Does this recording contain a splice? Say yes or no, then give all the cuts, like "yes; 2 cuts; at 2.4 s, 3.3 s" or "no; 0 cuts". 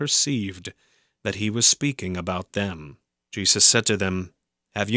yes; 1 cut; at 3.2 s